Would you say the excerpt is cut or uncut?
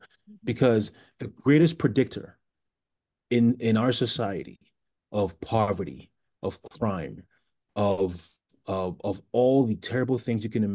uncut